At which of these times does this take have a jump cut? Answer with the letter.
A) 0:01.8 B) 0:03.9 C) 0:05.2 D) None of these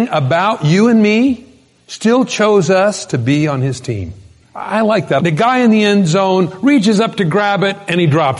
C